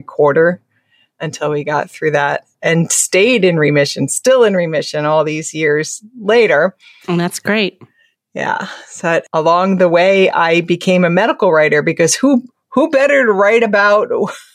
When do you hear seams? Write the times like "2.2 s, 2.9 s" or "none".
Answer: none